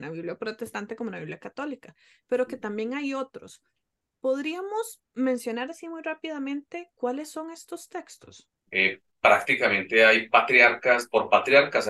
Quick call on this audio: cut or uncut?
cut